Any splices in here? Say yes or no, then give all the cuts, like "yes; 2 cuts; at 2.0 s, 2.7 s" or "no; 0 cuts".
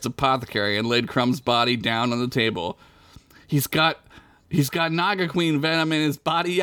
no; 0 cuts